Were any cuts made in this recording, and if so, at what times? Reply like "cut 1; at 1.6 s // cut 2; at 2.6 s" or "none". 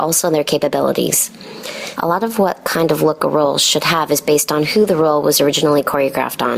cut 1; at 2.0 s